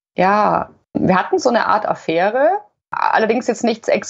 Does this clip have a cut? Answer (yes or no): no